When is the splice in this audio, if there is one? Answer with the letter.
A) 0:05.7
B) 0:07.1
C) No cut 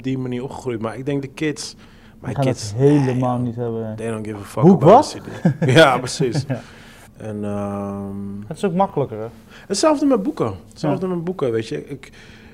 B